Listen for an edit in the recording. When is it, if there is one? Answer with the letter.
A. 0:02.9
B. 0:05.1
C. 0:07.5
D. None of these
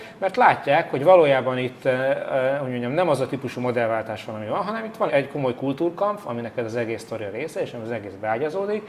B